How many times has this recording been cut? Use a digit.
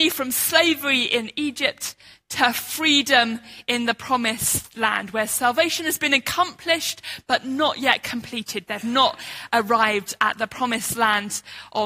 1